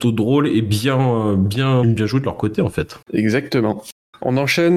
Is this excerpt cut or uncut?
cut